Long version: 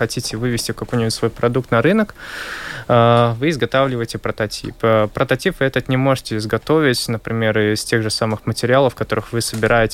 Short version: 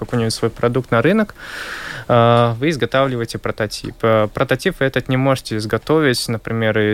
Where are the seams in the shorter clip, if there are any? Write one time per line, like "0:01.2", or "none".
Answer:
none